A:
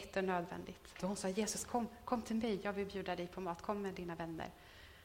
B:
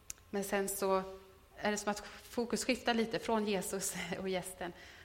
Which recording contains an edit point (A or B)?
A